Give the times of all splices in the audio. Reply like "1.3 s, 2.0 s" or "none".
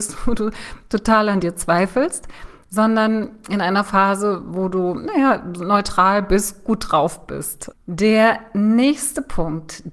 7.7 s